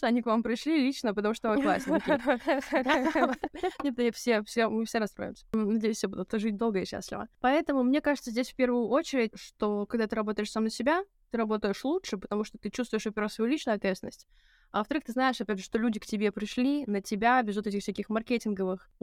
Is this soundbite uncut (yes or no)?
no